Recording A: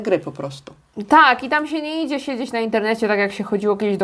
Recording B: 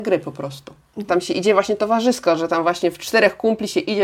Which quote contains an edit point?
B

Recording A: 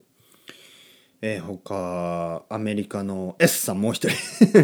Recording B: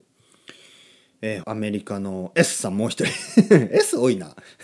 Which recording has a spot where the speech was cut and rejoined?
B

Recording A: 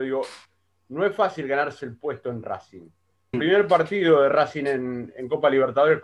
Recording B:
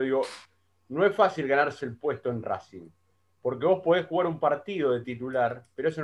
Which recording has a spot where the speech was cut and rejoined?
A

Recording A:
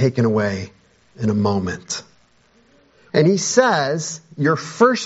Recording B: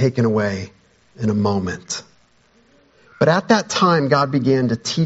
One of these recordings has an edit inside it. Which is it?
A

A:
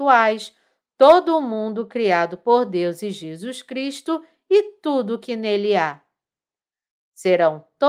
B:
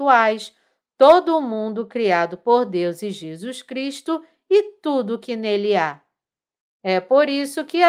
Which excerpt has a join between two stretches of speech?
B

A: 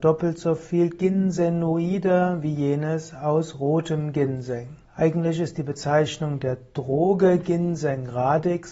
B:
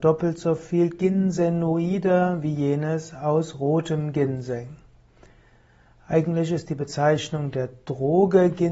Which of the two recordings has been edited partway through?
A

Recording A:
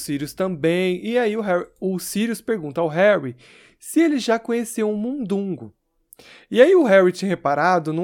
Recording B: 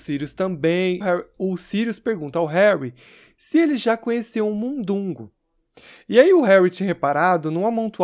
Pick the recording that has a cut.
B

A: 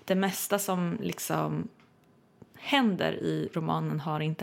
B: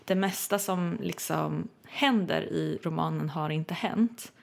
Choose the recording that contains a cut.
B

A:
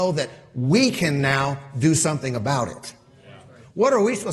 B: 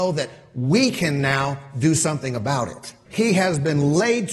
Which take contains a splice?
B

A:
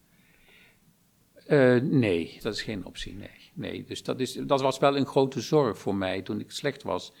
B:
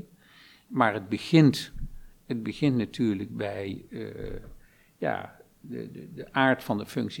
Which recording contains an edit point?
A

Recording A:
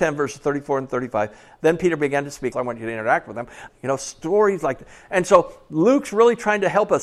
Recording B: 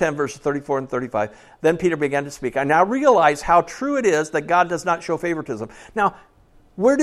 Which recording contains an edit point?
A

